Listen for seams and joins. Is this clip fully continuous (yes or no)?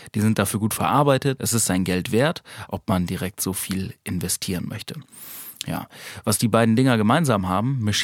no